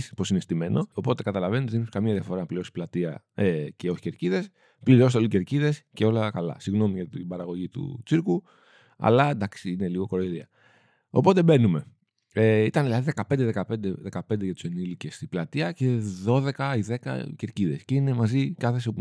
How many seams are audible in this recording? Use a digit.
1